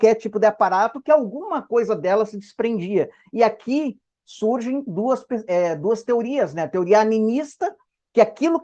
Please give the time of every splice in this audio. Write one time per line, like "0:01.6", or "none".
none